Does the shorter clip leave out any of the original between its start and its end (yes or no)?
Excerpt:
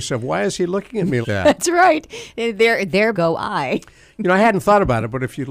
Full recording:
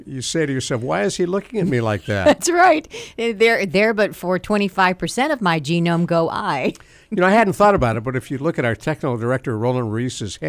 yes